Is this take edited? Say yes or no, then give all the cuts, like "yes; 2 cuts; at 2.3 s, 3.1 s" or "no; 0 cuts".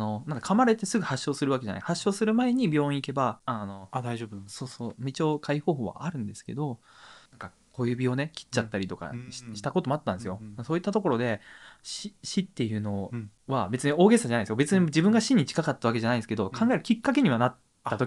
no; 0 cuts